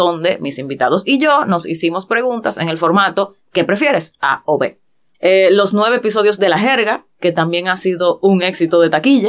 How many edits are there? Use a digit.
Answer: 1